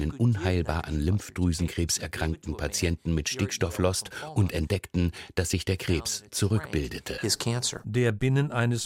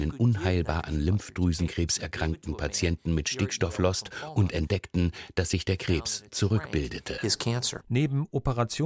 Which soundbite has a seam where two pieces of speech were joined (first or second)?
second